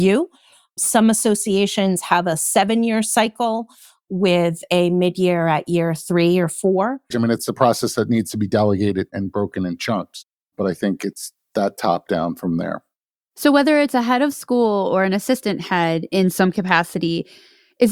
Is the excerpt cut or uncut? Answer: cut